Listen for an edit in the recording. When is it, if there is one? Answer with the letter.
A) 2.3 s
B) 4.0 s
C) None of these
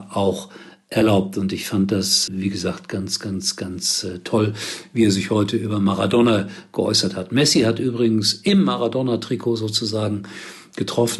A